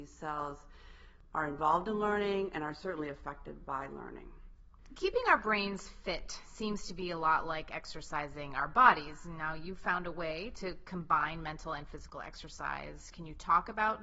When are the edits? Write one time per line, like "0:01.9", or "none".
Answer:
none